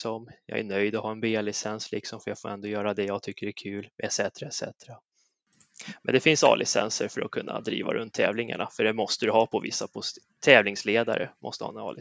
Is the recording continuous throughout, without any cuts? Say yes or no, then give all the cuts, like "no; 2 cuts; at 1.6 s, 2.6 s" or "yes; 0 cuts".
yes; 0 cuts